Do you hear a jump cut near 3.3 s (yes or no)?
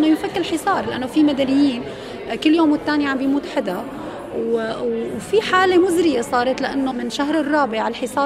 no